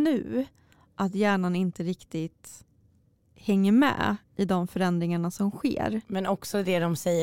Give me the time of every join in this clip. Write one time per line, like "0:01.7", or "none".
none

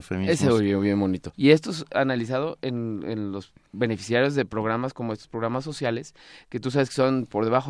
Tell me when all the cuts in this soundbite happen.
0:01.3

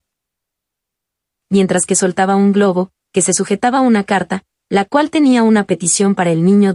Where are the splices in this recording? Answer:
none

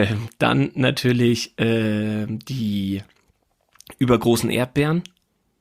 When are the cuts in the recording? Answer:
none

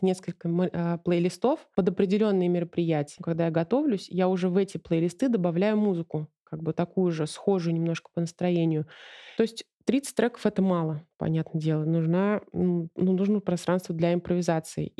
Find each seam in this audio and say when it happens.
0:03.2
0:09.4

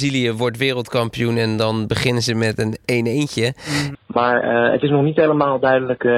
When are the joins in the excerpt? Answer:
0:03.9

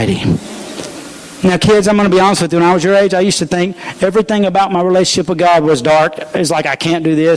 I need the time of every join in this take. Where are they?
none

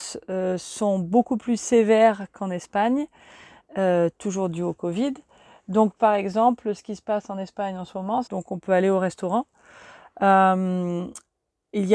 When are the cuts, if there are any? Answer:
0:08.2

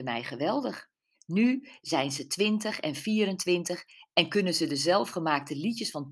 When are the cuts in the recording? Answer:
0:01.1

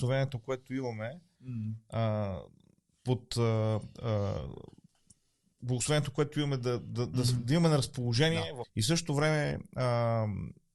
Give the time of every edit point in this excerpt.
0:08.6

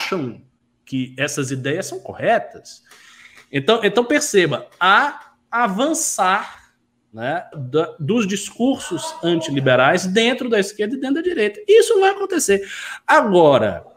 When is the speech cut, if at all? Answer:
0:05.5
0:07.5

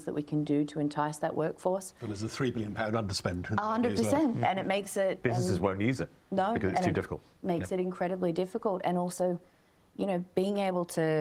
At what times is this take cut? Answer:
none

